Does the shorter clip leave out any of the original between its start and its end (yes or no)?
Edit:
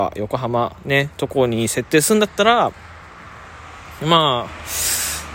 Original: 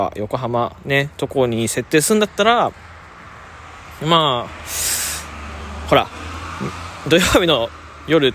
no